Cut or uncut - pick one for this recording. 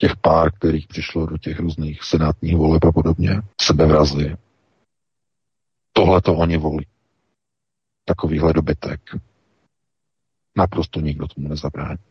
cut